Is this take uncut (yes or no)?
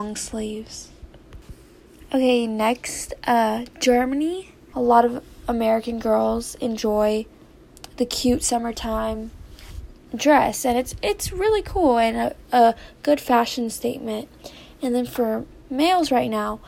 no